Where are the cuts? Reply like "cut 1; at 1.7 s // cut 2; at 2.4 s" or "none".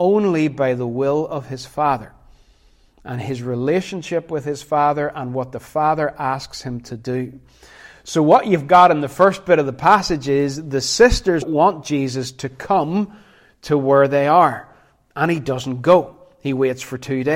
cut 1; at 11.4 s